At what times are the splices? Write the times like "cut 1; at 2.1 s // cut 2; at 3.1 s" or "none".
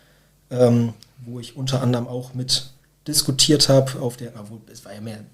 none